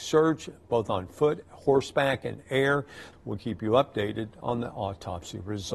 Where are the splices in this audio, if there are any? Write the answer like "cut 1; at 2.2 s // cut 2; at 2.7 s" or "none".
cut 1; at 3.1 s